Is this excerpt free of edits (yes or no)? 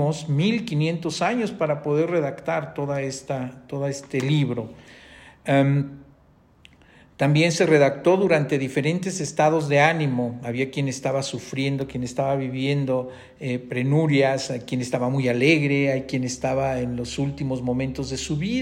yes